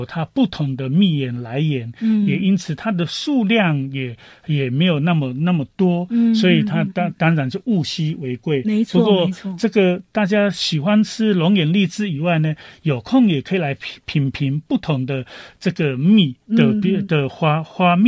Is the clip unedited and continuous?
yes; 0 cuts

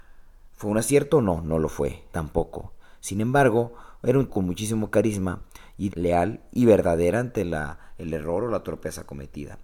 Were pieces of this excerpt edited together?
yes; 3 cuts; at 2.1 s, 4.3 s, 5.9 s

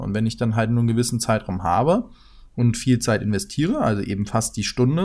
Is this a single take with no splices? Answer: yes; 0 cuts

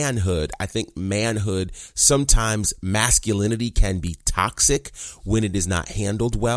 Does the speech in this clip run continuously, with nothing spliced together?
yes; 0 cuts

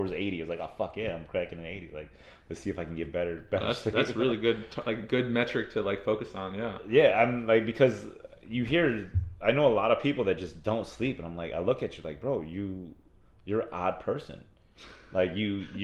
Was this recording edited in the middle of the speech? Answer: no; 0 cuts

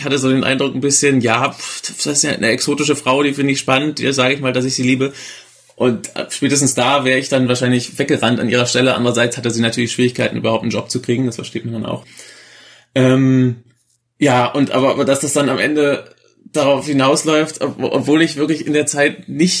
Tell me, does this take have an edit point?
no; 0 cuts

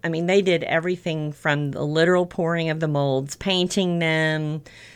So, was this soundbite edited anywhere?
no; 0 cuts

